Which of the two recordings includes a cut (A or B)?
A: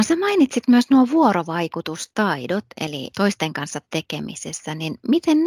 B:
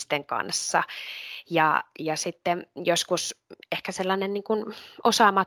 A